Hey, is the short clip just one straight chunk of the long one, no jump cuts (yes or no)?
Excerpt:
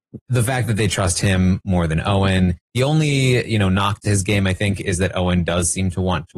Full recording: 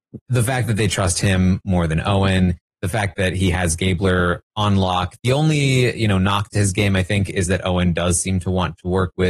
no